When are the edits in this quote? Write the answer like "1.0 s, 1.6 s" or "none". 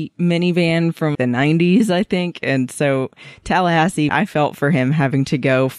1.1 s, 4.1 s

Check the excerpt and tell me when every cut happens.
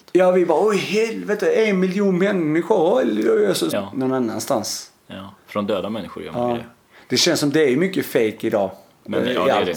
3.7 s

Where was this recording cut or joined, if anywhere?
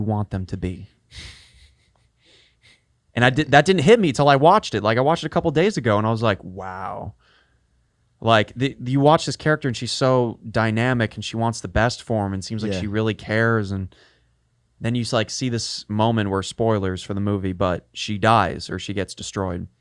none

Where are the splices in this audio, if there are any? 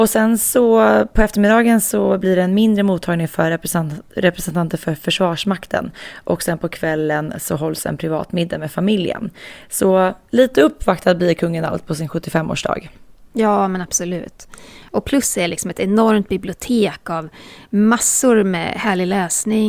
14.9 s

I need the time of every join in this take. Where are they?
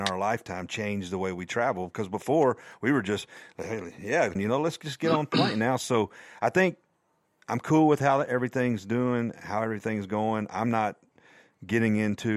4.3 s

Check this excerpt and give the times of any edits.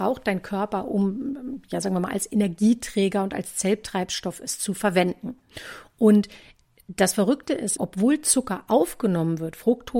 7.8 s

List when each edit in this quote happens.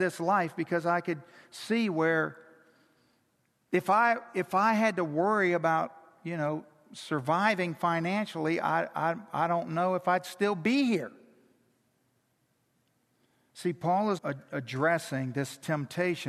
14.2 s

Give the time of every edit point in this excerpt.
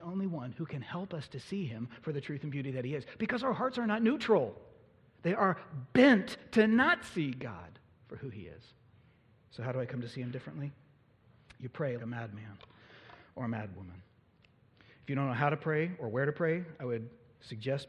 12.0 s

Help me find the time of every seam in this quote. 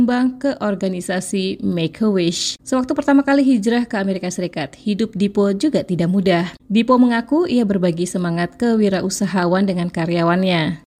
2.6 s, 6.6 s

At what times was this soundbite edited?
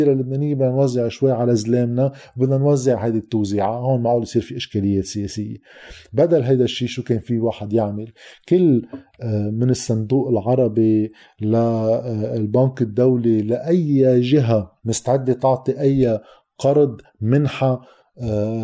14.8 s

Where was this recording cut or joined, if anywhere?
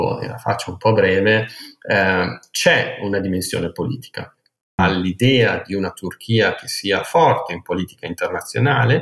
4.8 s

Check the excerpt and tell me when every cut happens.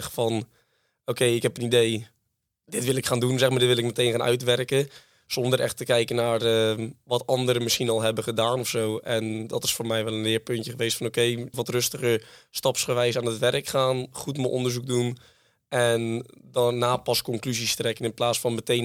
11.5 s

